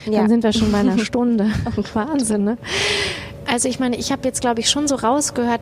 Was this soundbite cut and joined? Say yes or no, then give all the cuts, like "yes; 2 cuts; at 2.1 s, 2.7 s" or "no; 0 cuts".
yes; 1 cut; at 3.4 s